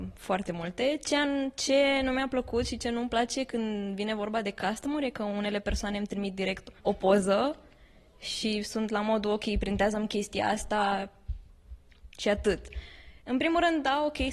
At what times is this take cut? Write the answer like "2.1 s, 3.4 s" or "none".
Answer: 6.8 s